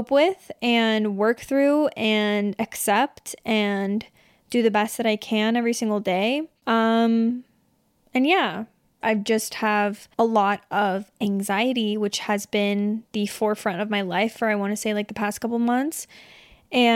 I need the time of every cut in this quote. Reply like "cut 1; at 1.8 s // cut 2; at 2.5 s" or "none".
cut 1; at 9.0 s // cut 2; at 10.1 s